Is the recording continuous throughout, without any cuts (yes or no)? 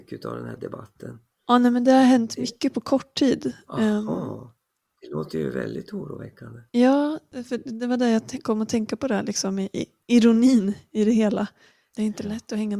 no